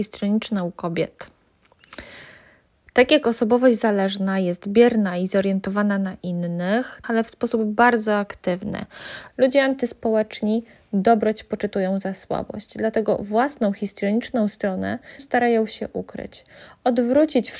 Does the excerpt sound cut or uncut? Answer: cut